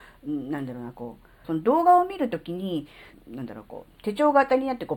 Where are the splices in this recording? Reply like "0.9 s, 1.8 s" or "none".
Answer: 1.4 s, 3.1 s